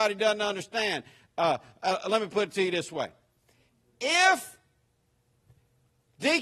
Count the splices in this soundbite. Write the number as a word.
zero